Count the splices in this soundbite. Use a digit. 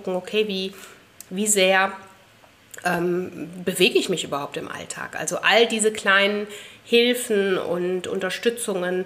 0